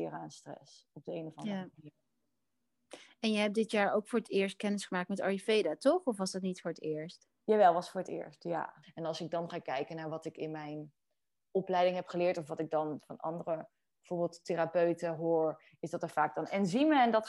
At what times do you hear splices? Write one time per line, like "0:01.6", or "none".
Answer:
0:08.8